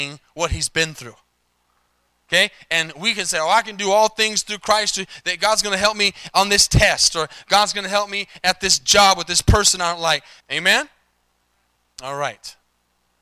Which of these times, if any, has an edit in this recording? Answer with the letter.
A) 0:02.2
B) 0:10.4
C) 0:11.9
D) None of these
B